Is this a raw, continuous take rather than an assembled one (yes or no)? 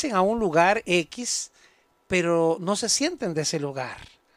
yes